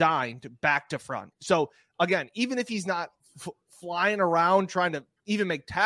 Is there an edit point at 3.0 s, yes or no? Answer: no